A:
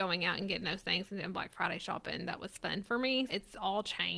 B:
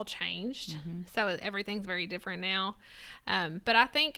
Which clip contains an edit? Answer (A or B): A